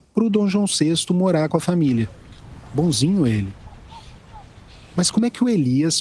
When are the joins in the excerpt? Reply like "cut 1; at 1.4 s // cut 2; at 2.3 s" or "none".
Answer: none